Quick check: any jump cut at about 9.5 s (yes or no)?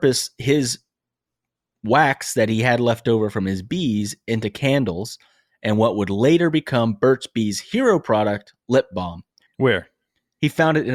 yes